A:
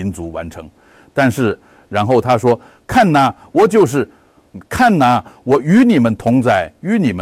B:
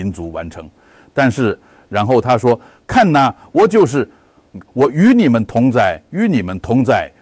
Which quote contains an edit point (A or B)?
B